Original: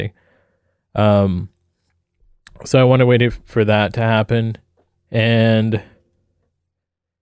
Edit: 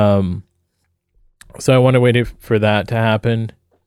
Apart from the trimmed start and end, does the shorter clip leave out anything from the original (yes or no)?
no